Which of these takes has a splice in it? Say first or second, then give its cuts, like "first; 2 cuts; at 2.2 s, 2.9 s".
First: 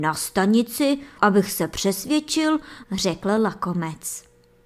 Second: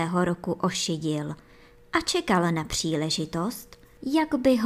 first; 2 cuts; at 1.2 s, 2.8 s